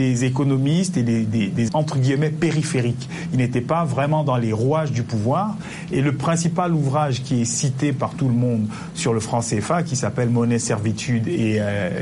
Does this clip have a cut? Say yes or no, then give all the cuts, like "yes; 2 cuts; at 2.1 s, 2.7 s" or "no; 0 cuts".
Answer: yes; 1 cut; at 1.7 s